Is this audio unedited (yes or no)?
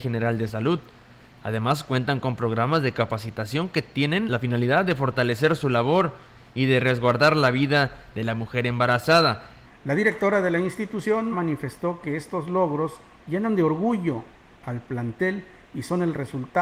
no